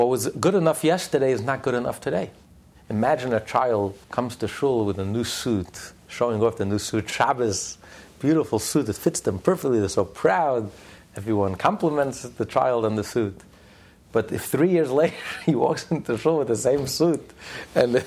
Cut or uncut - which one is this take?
cut